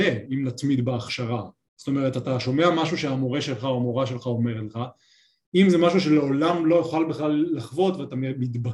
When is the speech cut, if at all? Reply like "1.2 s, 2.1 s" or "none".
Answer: none